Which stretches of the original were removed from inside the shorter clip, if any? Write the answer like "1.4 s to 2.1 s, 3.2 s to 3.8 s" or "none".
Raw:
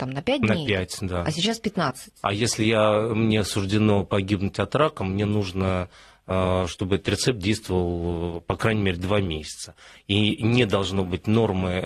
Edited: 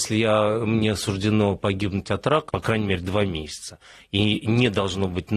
5.0 s to 8.4 s